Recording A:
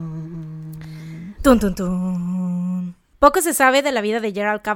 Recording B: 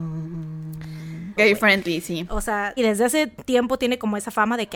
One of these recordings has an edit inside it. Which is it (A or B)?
B